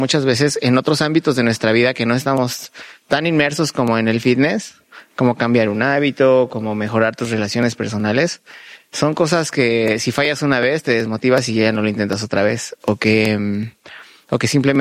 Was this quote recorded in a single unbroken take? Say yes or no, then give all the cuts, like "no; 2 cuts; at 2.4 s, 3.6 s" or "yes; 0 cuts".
yes; 0 cuts